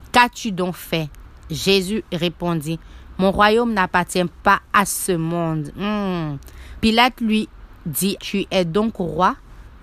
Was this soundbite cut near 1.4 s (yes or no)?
no